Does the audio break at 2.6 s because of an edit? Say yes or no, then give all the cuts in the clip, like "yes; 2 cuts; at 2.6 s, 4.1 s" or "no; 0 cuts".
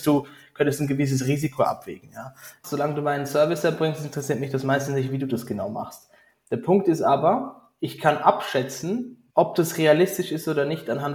yes; 2 cuts; at 2.6 s, 9.3 s